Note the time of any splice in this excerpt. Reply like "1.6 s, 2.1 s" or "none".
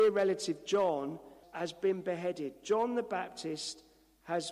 1.4 s